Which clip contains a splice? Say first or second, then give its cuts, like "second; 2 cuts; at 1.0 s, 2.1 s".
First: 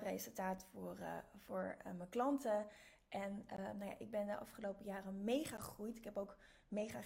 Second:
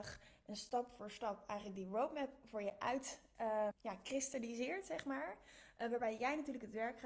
second; 1 cut; at 3.7 s